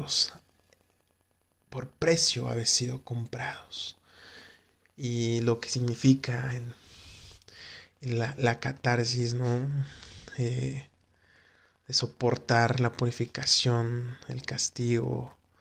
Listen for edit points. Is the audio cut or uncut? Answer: uncut